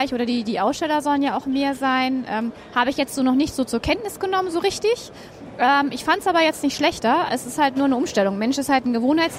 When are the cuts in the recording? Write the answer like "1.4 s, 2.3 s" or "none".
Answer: none